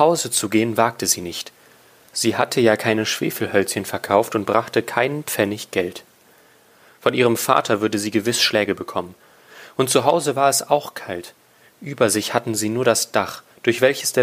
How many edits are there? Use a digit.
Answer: 0